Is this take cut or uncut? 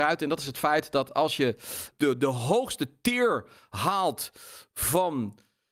cut